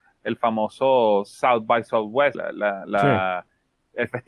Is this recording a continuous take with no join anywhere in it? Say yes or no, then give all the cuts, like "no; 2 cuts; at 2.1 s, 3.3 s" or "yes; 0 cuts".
no; 1 cut; at 2.3 s